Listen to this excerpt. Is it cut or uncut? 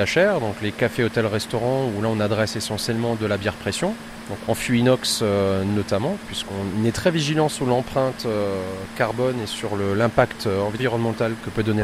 uncut